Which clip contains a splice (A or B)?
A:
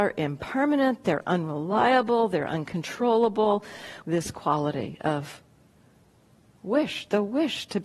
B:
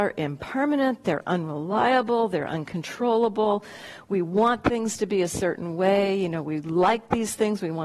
A